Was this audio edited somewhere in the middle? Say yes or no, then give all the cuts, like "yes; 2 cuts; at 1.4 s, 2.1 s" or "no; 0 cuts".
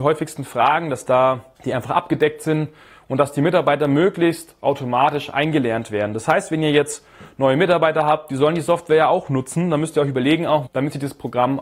yes; 1 cut; at 10.7 s